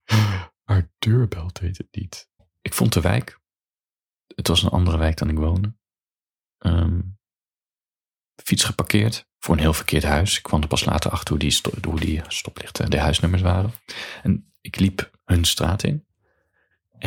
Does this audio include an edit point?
yes; 2 cuts; at 2.4 s, 9.3 s

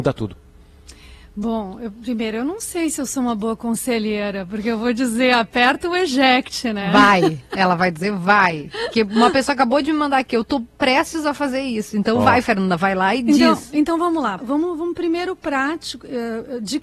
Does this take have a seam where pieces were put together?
yes; 1 cut; at 14.4 s

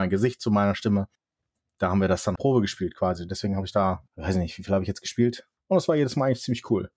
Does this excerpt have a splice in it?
yes; 3 cuts; at 2.4 s, 4.1 s, 5.6 s

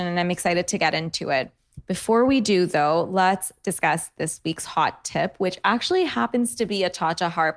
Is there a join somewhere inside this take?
no; 0 cuts

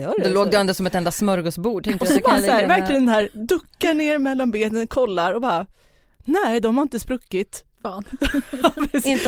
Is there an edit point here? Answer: no; 0 cuts

